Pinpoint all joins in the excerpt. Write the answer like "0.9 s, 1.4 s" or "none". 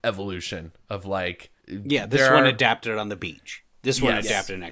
1.6 s